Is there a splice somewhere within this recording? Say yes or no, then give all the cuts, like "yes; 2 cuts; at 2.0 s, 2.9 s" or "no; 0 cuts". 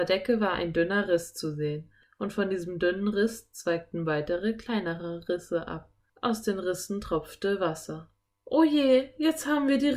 no; 0 cuts